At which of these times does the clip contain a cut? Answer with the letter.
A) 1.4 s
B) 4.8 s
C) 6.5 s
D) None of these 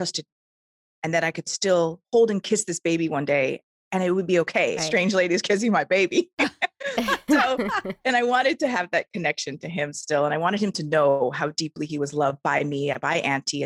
B